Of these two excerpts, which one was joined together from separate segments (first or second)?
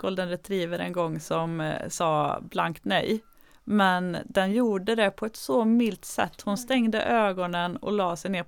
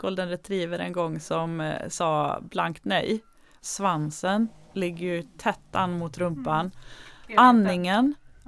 second